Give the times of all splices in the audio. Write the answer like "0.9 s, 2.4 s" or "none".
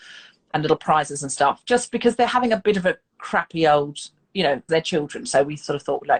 4.7 s